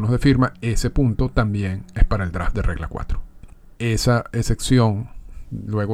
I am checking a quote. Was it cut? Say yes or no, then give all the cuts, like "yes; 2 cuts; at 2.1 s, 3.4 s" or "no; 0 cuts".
yes; 1 cut; at 3.8 s